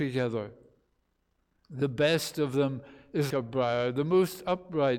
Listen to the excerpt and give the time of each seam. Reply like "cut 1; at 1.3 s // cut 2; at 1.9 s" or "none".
cut 1; at 3.3 s